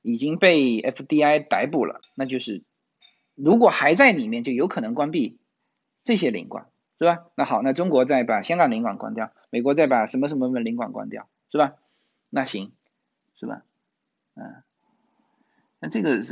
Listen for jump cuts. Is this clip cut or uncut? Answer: cut